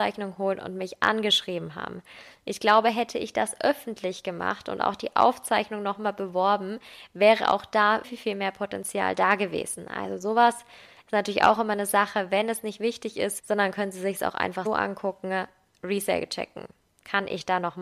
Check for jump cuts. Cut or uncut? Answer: cut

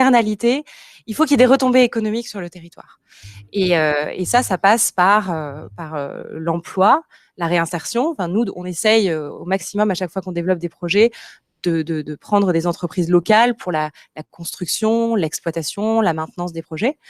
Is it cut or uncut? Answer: uncut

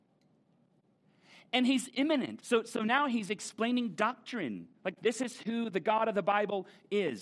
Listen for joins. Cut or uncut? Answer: cut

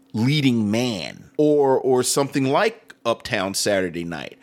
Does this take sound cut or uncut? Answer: cut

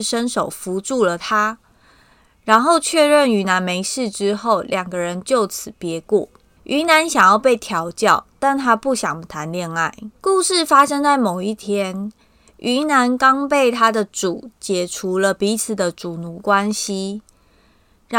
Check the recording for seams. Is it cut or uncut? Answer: cut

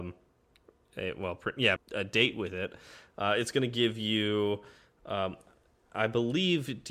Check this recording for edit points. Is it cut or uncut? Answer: cut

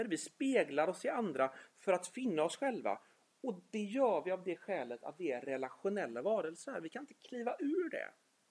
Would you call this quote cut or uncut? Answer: uncut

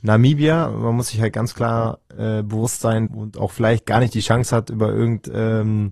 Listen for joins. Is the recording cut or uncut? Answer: cut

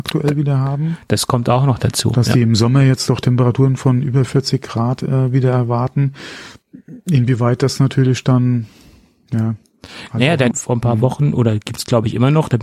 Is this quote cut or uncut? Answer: cut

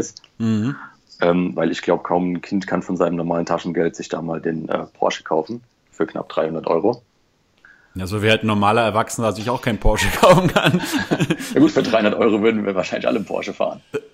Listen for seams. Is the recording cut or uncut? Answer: uncut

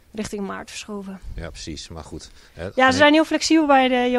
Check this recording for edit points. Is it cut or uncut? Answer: uncut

